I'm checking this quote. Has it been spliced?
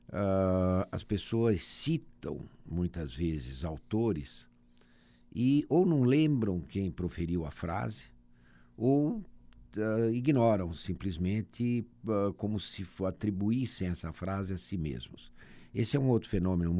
no; 0 cuts

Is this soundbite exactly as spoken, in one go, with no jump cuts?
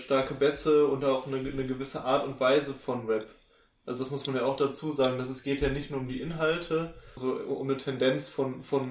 no; 1 cut; at 7.2 s

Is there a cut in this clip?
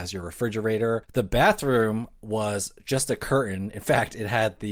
yes; 1 cut; at 1.0 s

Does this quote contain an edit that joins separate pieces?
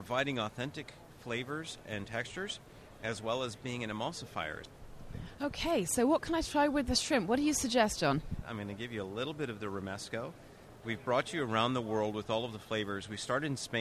yes; 2 cuts; at 8.4 s, 10.8 s

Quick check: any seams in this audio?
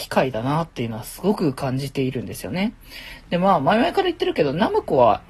no; 0 cuts

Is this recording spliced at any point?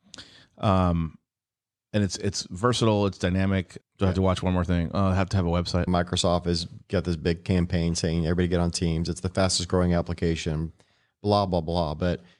yes; 3 cuts; at 3.8 s, 5.9 s, 11.5 s

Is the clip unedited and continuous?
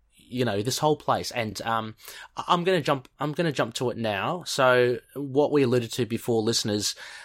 yes; 0 cuts

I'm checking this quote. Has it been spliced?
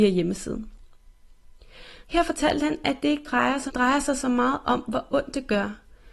yes; 2 cuts; at 2.0 s, 3.7 s

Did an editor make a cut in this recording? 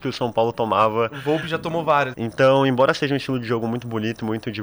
yes; 1 cut; at 2.1 s

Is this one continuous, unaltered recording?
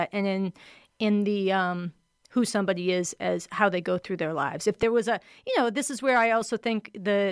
yes; 0 cuts

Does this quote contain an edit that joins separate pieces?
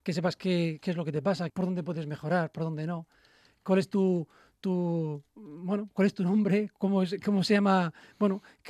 yes; 1 cut; at 1.5 s

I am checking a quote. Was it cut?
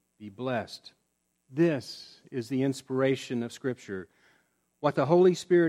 yes; 1 cut; at 1.3 s

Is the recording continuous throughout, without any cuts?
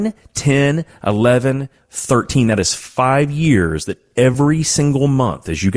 no; 1 cut; at 1.8 s

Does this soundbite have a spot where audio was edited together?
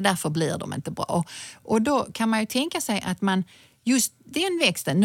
no; 0 cuts

